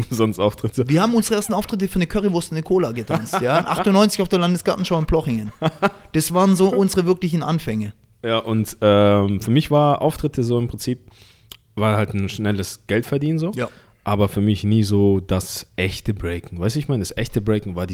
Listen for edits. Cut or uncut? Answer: uncut